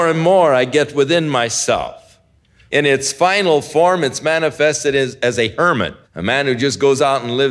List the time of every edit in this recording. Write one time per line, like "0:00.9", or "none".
0:02.7
0:06.0